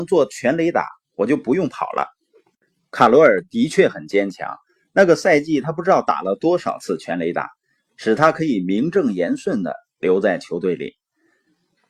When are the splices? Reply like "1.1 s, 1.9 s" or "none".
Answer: none